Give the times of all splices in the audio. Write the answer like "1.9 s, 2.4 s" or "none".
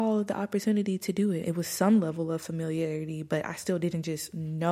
1.4 s